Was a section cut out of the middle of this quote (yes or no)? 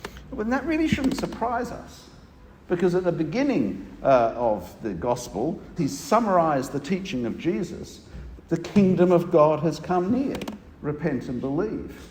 yes